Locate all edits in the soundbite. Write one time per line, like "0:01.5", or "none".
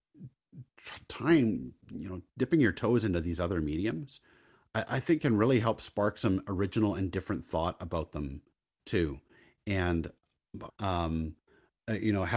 0:10.7